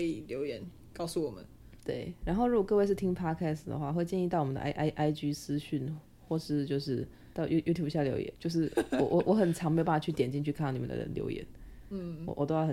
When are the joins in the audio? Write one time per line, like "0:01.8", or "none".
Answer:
0:01.8
0:07.3
0:08.3